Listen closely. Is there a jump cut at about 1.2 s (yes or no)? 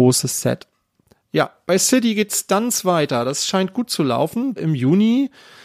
no